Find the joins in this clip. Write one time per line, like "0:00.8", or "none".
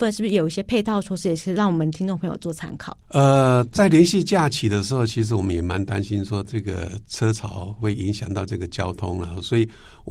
0:03.0